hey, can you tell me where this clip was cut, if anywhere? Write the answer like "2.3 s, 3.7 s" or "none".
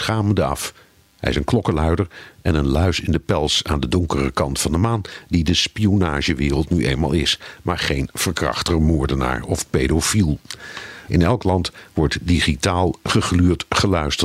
11.1 s